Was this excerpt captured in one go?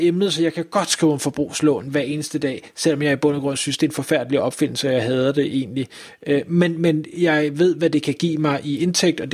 yes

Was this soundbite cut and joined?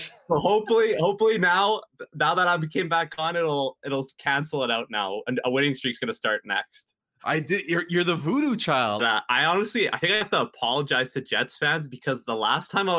yes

